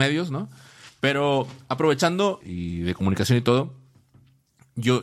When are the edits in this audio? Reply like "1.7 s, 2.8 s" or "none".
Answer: 2.4 s